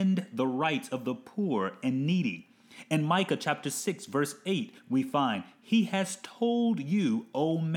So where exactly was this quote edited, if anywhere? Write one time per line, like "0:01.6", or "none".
none